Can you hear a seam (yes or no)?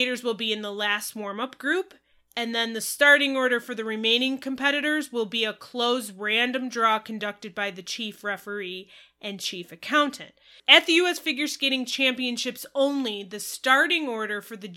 yes